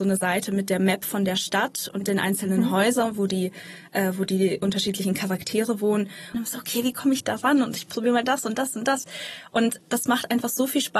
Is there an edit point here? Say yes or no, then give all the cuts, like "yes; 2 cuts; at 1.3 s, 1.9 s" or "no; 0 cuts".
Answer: yes; 1 cut; at 6.3 s